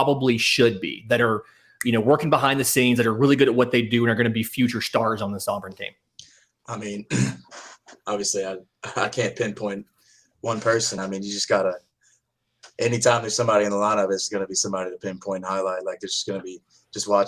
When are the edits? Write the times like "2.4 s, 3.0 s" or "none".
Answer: none